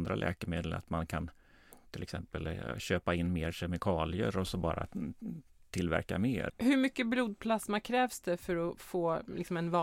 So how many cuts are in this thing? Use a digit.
1